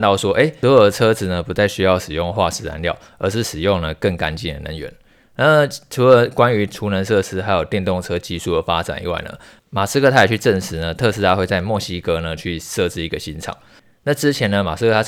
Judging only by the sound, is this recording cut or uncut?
uncut